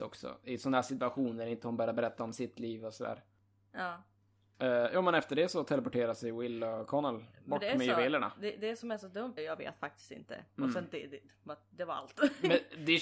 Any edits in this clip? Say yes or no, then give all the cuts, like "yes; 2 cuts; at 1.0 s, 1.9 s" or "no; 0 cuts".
yes; 2 cuts; at 9.4 s, 10.5 s